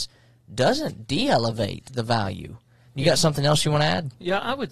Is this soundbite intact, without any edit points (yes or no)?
no